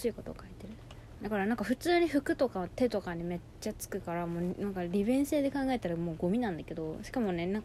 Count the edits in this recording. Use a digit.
1